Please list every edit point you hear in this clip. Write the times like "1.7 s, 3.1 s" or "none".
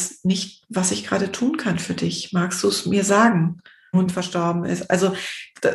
3.9 s